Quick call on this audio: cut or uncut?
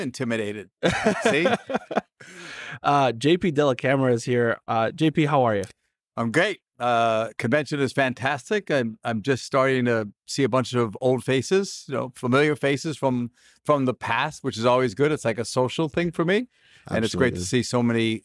uncut